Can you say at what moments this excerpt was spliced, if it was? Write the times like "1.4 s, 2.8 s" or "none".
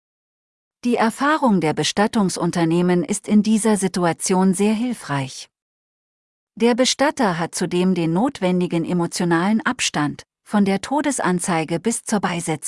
10.3 s